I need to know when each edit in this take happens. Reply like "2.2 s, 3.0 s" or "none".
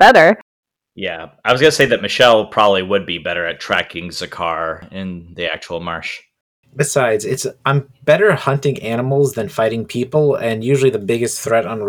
none